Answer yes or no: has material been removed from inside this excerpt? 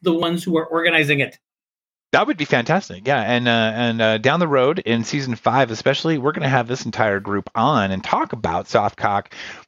no